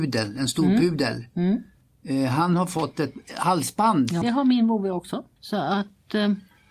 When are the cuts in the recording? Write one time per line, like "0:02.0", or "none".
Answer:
0:04.2
0:05.4